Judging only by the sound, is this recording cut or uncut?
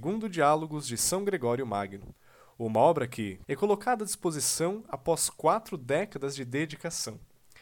cut